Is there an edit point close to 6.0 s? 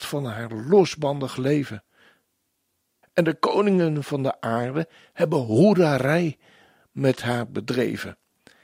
no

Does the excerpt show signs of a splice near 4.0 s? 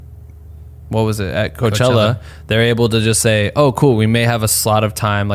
no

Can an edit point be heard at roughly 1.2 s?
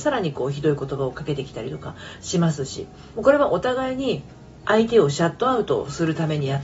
no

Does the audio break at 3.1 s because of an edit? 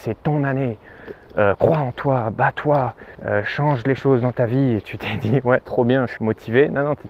yes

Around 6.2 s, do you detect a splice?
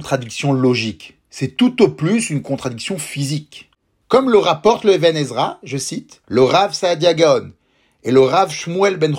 yes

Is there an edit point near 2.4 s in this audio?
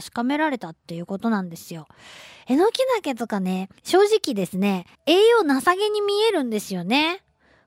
no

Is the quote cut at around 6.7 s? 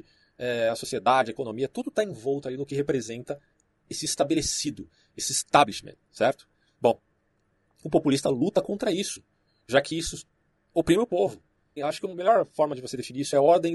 no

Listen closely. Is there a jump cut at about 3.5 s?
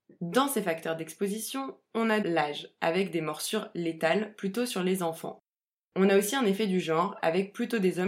no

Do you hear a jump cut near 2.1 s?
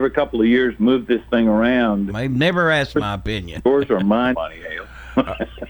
yes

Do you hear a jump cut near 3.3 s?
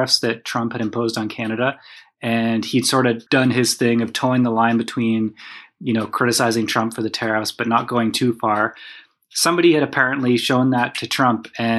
yes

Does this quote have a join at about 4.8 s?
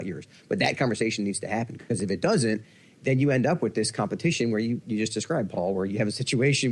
yes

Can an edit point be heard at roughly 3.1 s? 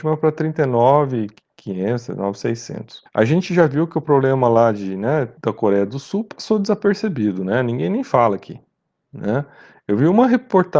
yes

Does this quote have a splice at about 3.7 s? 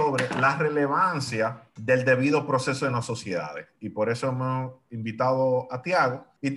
no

